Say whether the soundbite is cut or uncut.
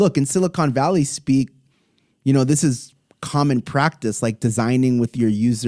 uncut